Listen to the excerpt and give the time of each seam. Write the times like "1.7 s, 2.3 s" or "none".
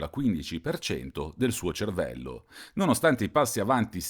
none